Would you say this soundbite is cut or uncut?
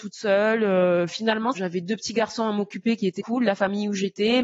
cut